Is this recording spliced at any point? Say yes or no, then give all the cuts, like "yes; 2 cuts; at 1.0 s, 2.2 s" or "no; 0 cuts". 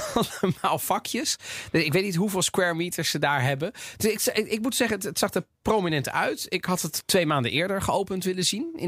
no; 0 cuts